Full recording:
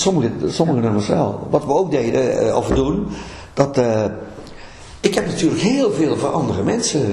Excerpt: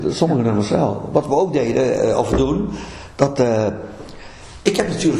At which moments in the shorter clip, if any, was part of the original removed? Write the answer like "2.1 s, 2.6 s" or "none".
none

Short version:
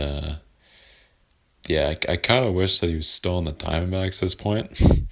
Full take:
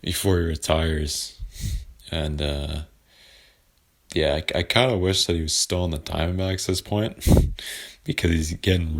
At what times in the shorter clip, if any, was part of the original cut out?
none

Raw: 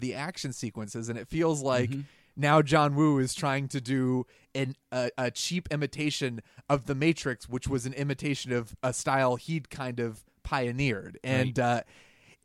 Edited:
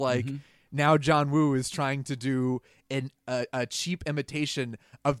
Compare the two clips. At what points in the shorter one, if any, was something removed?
none

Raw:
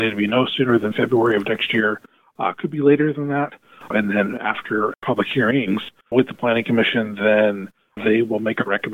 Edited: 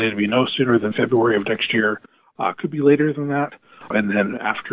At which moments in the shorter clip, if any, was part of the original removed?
none

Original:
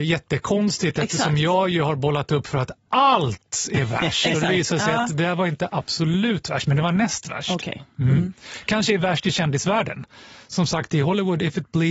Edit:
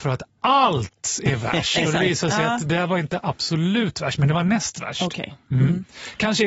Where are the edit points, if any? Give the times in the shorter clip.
none

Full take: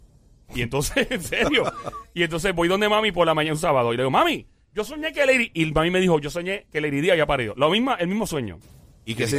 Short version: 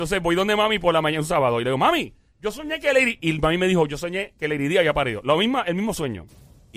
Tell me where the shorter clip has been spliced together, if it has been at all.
none

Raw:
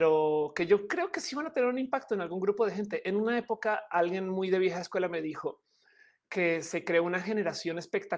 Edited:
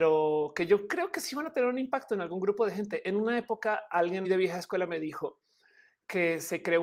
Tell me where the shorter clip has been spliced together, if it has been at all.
4.2 s

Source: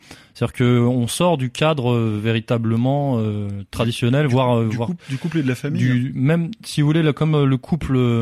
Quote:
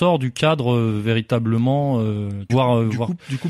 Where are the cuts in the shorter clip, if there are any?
2.5 s

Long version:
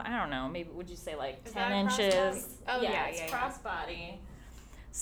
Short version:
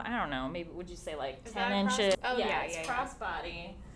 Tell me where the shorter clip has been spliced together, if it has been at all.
2.1 s

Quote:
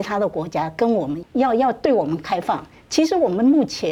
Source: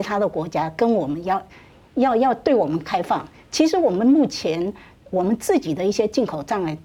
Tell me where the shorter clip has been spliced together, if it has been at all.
1.2 s

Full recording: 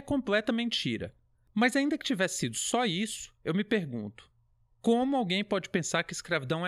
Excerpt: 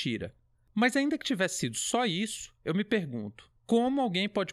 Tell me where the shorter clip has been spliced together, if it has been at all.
3.6 s

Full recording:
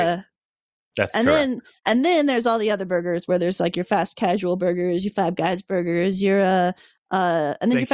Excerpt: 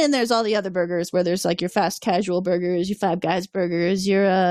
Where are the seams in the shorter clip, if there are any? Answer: none

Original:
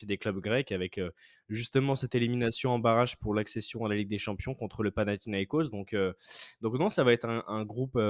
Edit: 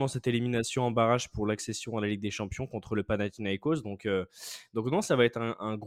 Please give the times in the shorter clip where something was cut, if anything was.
none

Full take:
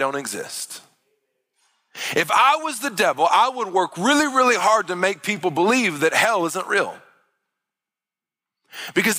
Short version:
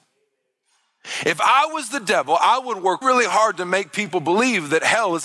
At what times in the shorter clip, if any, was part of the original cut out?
3.0 s

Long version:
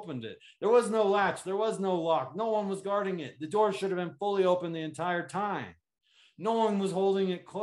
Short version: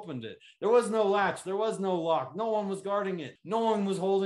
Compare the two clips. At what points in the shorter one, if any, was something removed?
3.4 s

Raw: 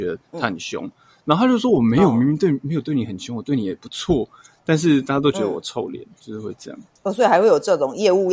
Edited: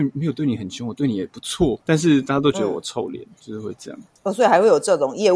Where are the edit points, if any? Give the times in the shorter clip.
1.8 s

